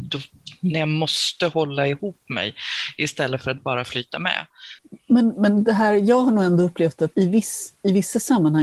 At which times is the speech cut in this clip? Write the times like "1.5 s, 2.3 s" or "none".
7.1 s